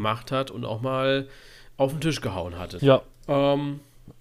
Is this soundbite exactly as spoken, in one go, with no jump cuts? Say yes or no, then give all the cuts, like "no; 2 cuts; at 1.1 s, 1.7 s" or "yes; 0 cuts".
no; 1 cut; at 2.8 s